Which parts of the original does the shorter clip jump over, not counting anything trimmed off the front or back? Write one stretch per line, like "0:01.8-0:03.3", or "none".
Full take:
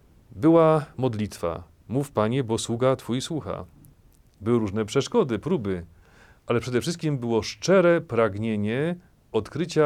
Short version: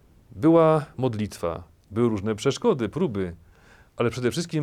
0:01.8-0:04.3